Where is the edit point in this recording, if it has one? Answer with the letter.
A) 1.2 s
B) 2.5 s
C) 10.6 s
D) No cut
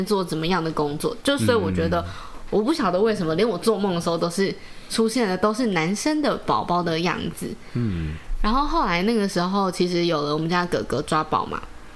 B